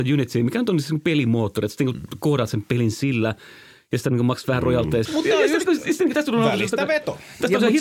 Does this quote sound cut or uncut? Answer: cut